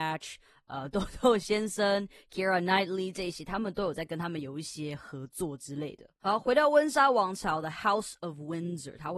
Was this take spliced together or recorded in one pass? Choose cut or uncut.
uncut